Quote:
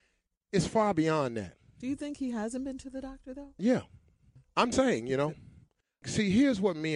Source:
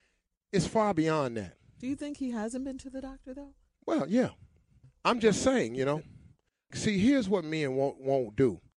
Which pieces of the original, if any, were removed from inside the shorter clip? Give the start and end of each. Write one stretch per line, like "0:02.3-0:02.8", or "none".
0:03.6-0:04.1
0:05.2-0:05.4